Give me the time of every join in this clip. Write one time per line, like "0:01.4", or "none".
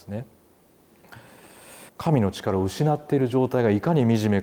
0:01.9